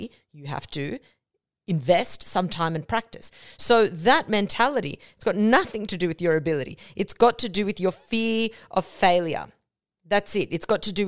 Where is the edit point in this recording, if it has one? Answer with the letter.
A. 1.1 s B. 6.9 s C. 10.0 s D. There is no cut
D